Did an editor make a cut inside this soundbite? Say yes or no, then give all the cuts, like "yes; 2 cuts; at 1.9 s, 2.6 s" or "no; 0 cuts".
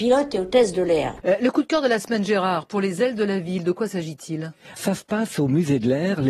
yes; 2 cuts; at 1.2 s, 4.8 s